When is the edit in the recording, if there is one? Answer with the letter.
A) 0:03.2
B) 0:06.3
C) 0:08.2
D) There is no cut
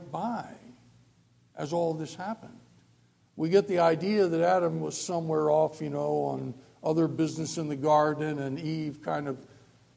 D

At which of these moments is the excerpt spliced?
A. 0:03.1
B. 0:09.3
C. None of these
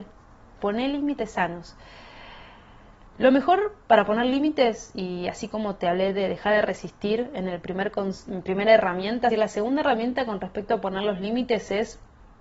B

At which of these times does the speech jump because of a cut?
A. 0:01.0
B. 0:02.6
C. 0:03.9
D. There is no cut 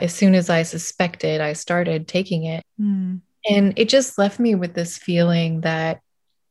B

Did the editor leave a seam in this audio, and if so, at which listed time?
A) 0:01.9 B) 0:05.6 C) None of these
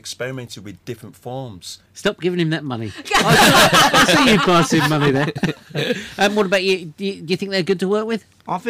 A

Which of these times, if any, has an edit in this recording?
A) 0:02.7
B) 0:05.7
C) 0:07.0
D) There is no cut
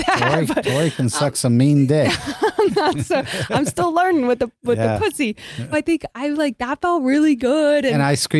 B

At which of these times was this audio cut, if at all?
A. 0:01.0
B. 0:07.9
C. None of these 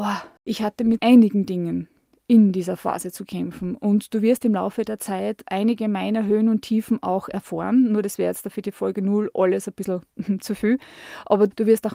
A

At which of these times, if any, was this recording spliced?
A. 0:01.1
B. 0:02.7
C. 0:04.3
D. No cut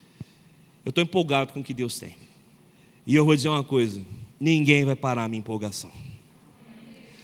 C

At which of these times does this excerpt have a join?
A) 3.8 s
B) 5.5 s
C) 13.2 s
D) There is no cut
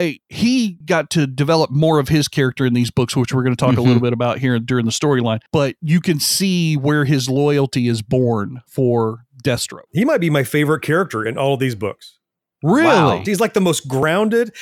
C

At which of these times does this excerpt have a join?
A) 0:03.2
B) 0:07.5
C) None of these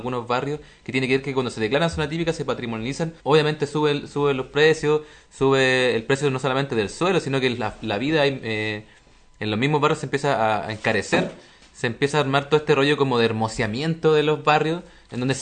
A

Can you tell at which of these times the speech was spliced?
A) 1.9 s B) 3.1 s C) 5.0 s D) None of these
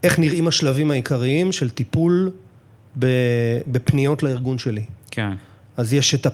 D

